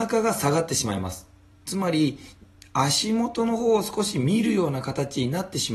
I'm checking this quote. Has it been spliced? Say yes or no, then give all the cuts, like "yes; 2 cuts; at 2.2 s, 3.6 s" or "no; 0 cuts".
yes; 1 cut; at 1.5 s